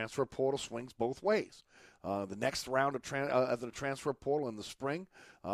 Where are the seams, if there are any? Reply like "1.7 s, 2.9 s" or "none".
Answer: none